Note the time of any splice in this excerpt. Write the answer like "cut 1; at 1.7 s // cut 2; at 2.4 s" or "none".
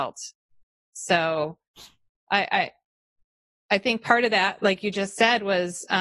none